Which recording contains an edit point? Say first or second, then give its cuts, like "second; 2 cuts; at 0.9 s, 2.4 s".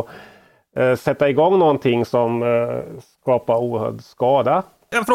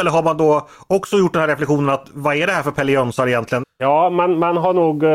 second; 1 cut; at 3.6 s